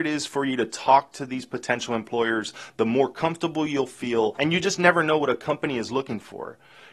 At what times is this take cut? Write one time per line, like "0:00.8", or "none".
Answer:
none